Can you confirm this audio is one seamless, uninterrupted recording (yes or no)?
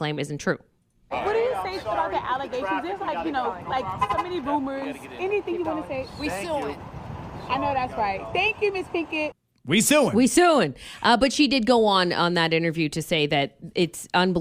yes